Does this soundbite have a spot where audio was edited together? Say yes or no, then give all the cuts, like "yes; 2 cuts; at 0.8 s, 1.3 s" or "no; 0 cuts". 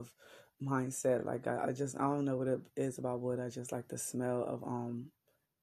no; 0 cuts